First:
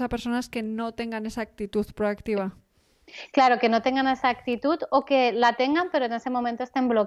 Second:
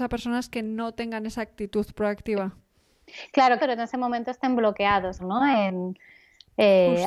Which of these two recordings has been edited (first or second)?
second